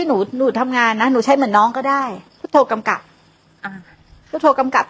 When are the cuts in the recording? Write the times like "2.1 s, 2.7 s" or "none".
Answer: 2.3 s